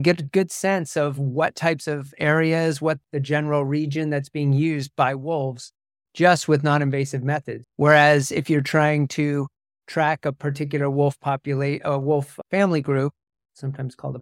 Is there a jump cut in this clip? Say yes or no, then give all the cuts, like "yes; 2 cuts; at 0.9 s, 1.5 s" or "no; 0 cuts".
yes; 1 cut; at 7.6 s